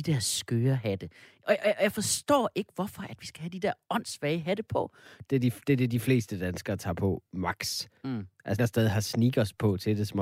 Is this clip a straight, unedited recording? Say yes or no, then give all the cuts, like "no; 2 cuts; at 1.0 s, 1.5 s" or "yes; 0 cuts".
no; 2 cuts; at 5.3 s, 8.6 s